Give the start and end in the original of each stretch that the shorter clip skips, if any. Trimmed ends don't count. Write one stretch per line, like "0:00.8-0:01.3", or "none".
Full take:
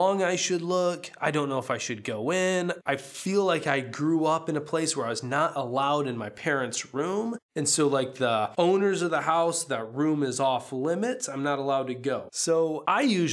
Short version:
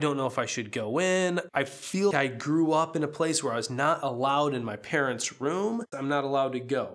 0:03.4-0:03.6
0:07.5-0:11.3